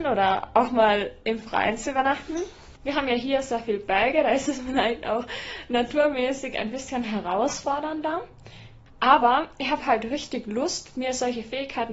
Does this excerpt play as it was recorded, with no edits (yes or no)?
yes